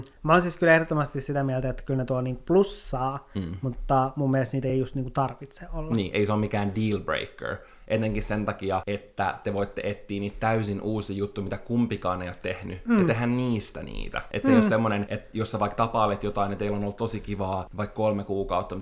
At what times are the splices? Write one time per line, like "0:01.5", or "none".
none